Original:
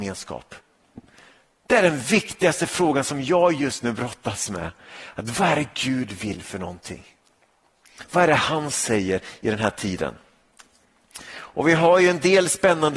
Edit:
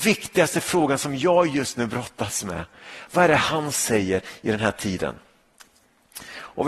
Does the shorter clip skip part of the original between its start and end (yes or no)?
yes